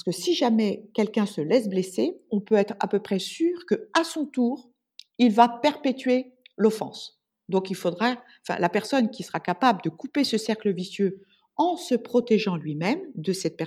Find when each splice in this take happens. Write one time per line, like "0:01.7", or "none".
0:07.3

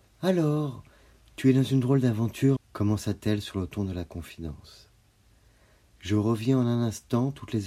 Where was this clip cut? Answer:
0:02.6

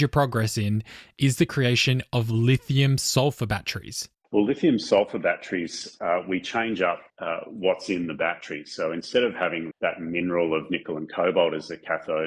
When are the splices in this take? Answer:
0:04.1
0:07.1
0:09.7

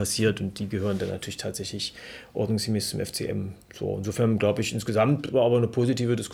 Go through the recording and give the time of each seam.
none

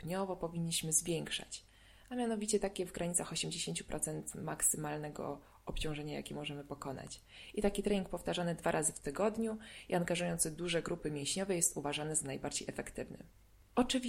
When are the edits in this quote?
none

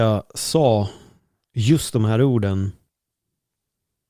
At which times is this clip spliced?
none

